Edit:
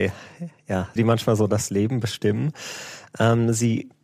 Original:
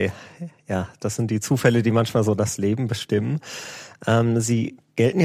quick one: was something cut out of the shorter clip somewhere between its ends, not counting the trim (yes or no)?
yes